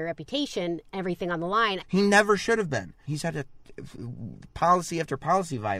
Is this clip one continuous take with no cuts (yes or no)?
no